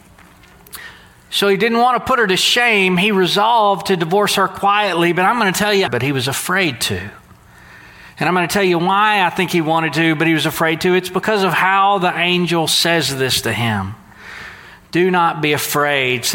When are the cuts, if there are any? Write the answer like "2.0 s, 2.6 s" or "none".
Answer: 5.9 s